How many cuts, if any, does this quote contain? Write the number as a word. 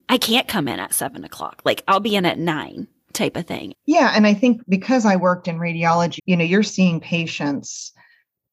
two